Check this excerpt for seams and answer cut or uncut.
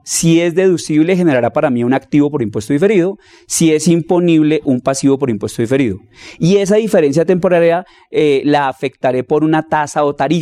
uncut